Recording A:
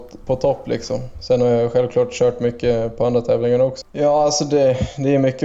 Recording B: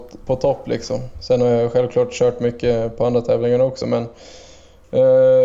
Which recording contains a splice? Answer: A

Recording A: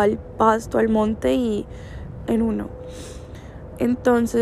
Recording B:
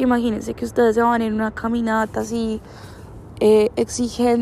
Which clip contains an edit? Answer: A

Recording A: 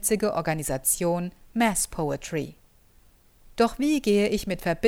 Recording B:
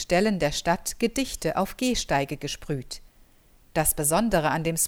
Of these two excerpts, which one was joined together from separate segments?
A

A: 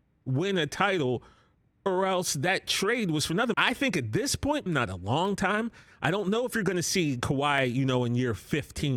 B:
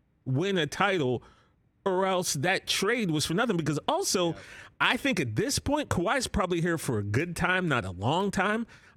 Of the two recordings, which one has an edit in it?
A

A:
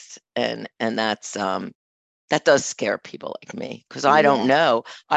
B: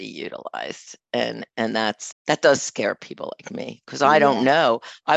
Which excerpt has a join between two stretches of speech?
B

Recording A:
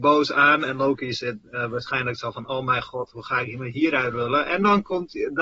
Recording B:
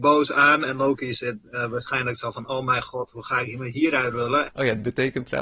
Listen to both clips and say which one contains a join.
B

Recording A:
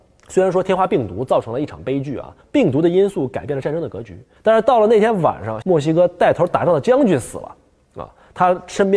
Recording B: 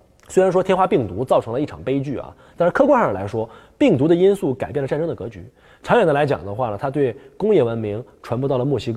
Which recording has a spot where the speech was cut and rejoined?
A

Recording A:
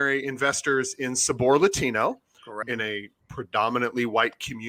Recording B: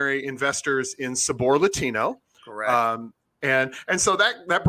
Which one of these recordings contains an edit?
A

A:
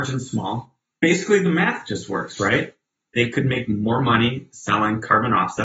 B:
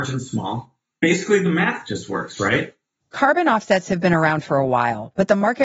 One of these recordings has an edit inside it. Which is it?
B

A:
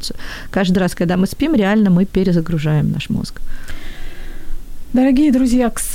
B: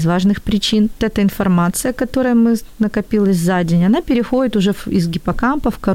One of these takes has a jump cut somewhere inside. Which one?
B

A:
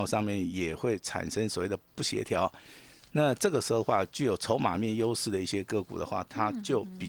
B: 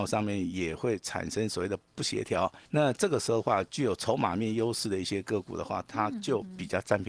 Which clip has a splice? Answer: B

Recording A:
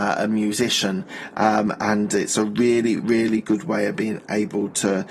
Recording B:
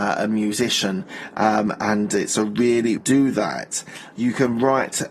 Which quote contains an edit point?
B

